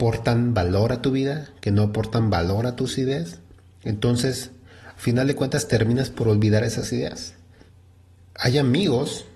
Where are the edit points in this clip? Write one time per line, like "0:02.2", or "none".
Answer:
none